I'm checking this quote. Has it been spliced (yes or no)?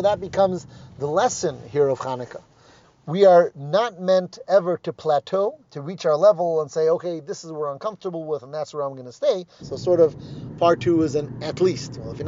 yes